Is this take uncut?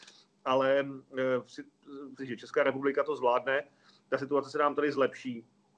no; 1 cut; at 2.2 s

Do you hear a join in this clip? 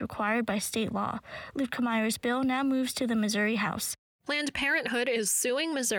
no; 0 cuts

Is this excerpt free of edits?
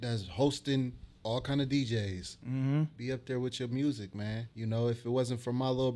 no; 1 cut; at 4.5 s

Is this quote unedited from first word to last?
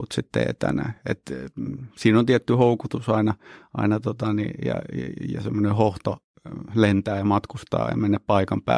yes; 0 cuts

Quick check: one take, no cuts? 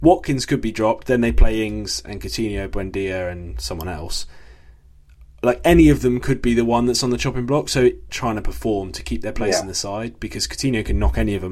no; 1 cut; at 8.1 s

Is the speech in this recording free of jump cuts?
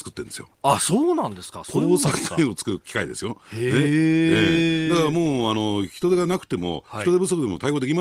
yes; 0 cuts

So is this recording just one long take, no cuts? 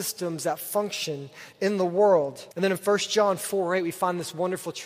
no; 1 cut; at 2.5 s

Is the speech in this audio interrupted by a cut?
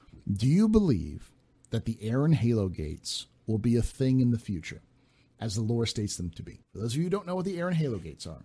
yes; 1 cut; at 6.6 s

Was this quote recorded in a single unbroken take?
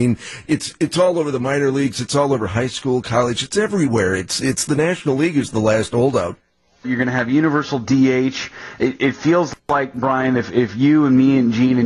no; 1 cut; at 6.8 s

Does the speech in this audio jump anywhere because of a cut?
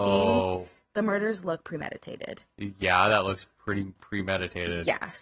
no; 0 cuts

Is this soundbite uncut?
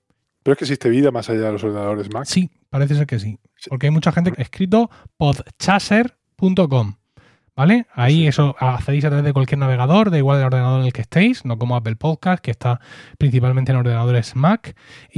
no; 1 cut; at 4.3 s

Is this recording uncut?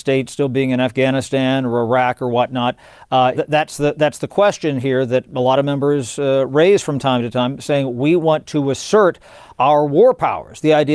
no; 1 cut; at 3.3 s

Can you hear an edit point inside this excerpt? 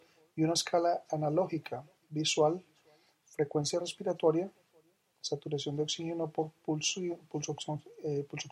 no; 0 cuts

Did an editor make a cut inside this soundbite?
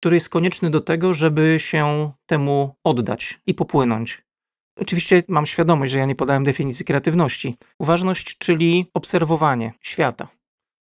yes; 1 cut; at 7.7 s

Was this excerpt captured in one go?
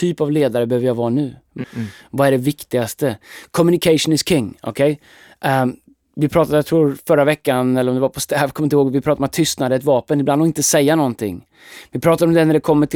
no; 1 cut; at 1.6 s

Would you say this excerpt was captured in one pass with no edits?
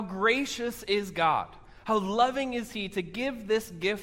yes; 0 cuts

